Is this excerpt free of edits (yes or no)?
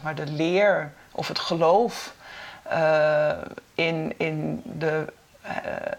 yes